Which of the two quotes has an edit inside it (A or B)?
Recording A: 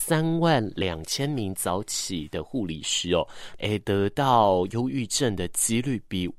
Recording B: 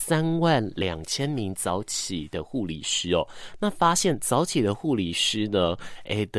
A